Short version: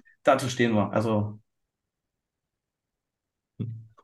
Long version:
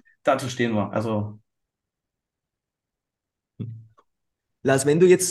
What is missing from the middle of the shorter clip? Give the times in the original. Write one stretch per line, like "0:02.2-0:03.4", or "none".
none